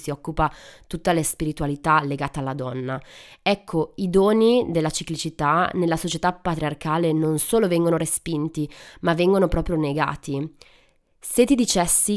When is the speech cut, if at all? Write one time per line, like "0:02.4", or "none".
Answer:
none